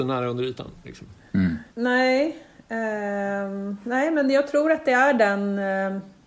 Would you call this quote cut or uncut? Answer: cut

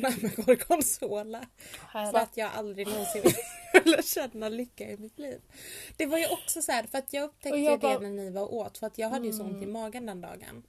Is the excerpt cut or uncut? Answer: cut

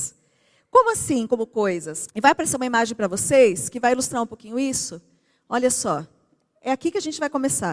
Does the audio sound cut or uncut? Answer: cut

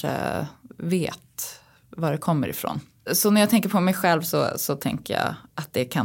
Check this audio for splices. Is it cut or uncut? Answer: cut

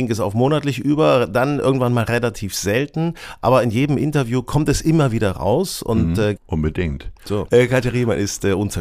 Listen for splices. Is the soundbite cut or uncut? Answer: cut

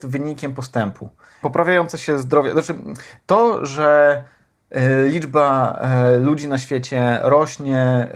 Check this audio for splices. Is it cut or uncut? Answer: cut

